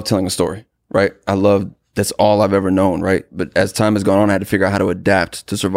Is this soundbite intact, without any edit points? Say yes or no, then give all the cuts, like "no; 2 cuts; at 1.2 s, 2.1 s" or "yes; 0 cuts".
yes; 0 cuts